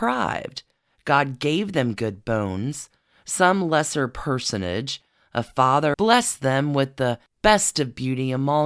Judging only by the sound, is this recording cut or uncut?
cut